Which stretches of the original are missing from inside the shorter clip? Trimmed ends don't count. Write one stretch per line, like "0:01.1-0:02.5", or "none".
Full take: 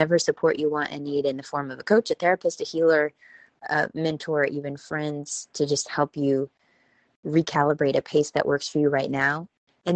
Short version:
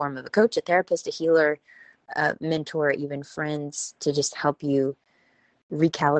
none